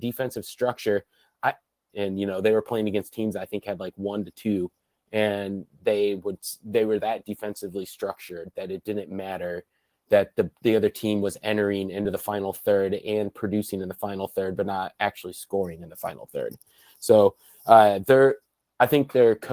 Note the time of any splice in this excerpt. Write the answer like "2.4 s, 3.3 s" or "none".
1.9 s